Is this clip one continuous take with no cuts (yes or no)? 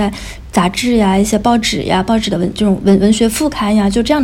yes